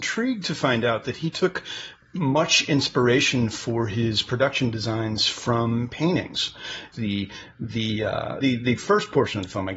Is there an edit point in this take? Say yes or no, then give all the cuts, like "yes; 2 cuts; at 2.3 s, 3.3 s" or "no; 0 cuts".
yes; 2 cuts; at 6.9 s, 8.4 s